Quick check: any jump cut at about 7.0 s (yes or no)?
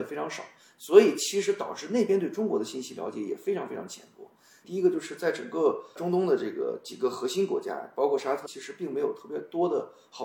no